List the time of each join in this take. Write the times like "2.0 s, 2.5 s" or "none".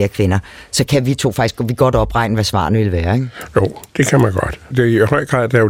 4.7 s

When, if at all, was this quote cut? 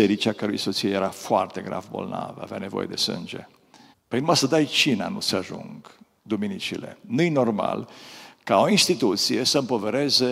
3.9 s

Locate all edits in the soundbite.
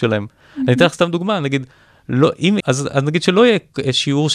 2.6 s

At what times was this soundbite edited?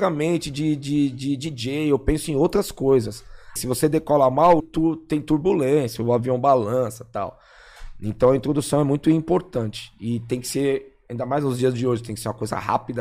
3.6 s, 4.6 s

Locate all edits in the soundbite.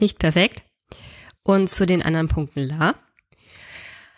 1.3 s

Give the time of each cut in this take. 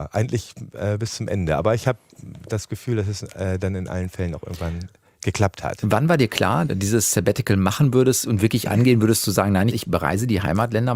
6.7 s, 9.7 s

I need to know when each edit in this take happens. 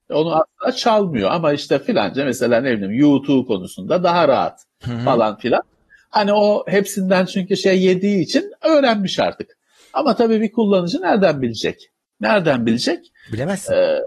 none

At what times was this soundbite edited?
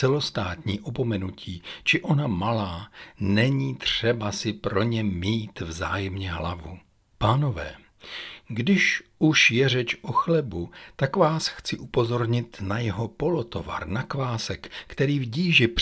7.1 s

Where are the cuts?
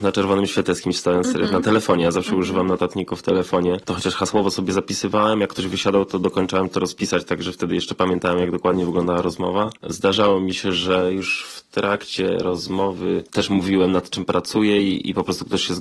none

